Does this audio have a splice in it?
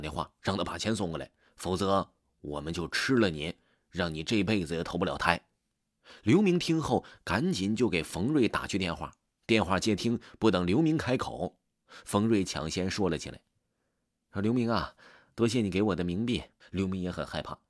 yes; 2 cuts; at 9.4 s, 16.6 s

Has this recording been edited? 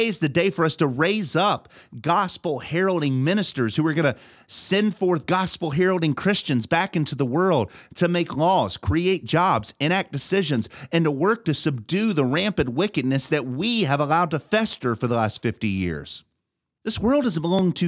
yes; 1 cut; at 16.8 s

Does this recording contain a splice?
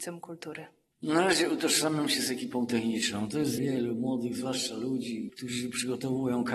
yes; 2 cuts; at 3.6 s, 5.3 s

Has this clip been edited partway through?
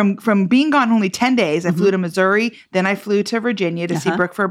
no; 0 cuts

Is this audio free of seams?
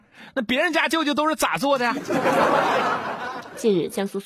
yes; 0 cuts

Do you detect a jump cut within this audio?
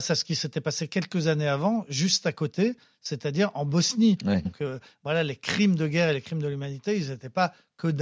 yes; 1 cut; at 4.4 s

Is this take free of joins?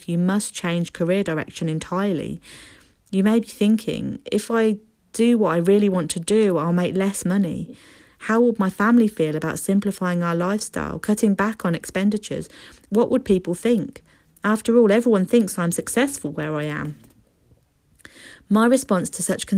yes; 0 cuts

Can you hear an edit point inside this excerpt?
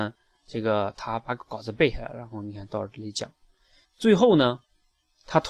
yes; 1 cut; at 3.8 s

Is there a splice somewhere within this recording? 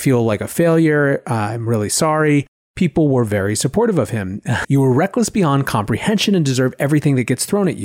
yes; 1 cut; at 4.6 s

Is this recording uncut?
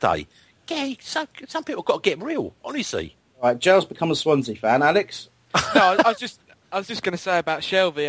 yes; 0 cuts

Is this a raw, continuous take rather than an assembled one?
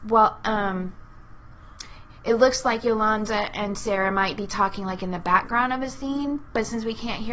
yes; 0 cuts

